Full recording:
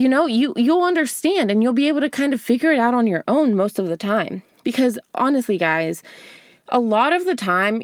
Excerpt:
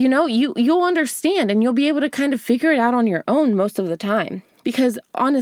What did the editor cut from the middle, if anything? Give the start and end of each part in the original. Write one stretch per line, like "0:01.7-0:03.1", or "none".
none